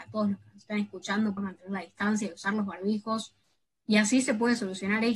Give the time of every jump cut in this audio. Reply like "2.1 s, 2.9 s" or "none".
1.4 s